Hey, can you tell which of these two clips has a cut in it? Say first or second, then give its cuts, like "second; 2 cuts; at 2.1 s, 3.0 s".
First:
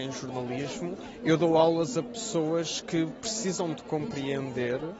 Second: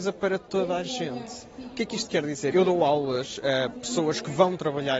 second; 1 cut; at 2.5 s